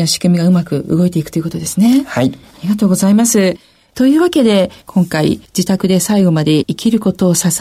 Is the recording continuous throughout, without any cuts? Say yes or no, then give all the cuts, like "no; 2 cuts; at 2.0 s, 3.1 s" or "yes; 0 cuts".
yes; 0 cuts